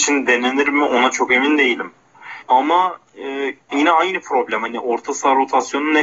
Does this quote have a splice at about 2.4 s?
yes; 2 cuts; at 2.4 s, 3.6 s

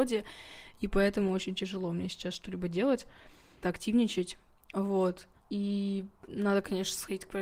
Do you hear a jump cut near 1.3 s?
no; 2 cuts; at 3.6 s, 5.4 s

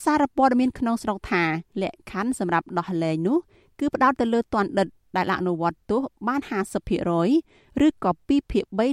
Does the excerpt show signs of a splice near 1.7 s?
yes; 1 cut; at 1.7 s

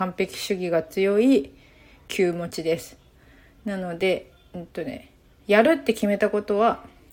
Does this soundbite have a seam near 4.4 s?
no; 0 cuts

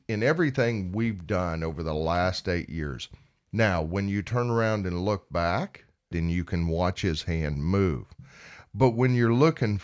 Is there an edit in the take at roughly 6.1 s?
yes; 2 cuts; at 3.5 s, 6.1 s

